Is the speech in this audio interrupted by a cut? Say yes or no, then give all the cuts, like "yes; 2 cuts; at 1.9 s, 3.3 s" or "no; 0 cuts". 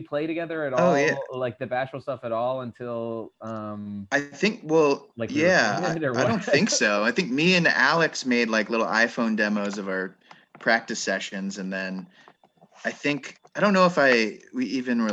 no; 0 cuts